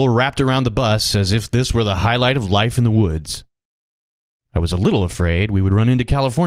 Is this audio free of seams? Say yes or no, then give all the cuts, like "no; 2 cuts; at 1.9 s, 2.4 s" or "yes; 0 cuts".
yes; 0 cuts